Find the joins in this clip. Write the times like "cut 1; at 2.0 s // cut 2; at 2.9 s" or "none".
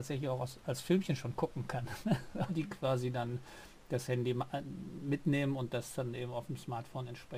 cut 1; at 2.5 s

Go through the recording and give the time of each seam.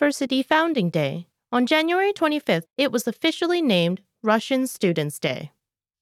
cut 1; at 2.6 s

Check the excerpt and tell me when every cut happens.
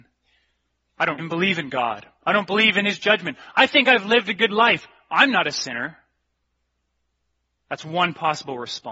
cut 1; at 1.2 s // cut 2; at 7.6 s

